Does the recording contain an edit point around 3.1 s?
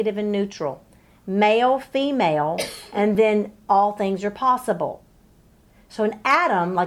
no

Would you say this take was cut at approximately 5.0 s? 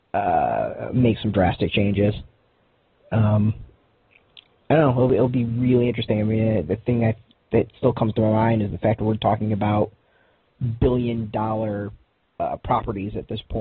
no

